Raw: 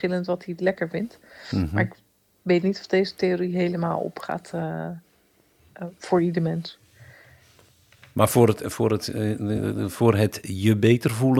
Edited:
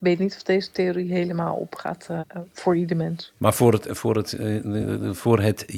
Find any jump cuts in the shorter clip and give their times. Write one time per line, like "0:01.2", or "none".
0:02.2
0:03.4